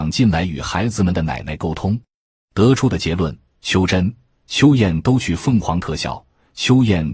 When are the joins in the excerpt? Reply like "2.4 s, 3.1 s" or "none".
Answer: 2.4 s